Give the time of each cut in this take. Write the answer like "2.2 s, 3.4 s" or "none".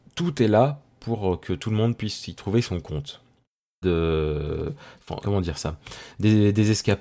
3.8 s, 5.2 s